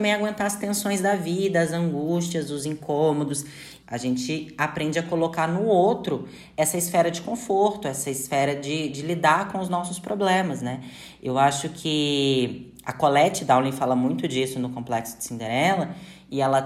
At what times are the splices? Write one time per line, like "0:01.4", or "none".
0:03.8